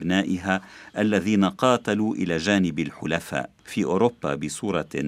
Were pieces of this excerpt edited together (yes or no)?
yes